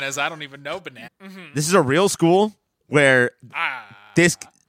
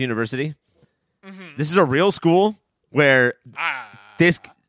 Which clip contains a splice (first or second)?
first